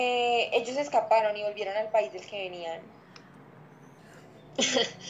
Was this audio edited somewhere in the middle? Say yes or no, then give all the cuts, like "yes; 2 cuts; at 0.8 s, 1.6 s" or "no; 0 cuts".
yes; 1 cut; at 4.0 s